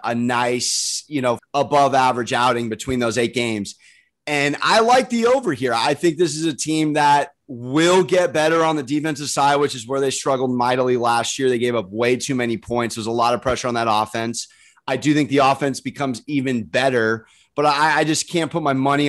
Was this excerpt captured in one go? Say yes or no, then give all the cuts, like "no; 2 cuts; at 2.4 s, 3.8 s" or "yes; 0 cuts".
no; 1 cut; at 1.4 s